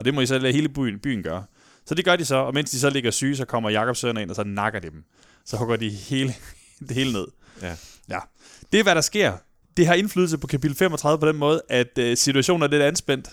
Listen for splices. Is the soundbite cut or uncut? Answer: uncut